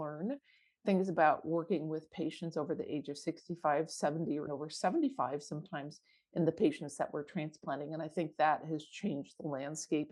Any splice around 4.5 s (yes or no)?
yes